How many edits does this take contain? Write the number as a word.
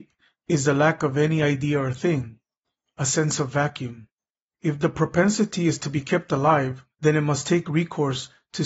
two